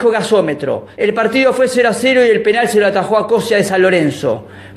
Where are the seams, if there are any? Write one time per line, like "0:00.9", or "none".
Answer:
0:00.9